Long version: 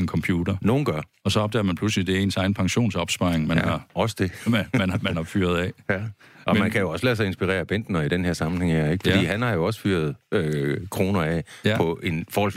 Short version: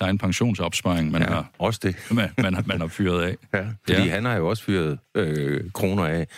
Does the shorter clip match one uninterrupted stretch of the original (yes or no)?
no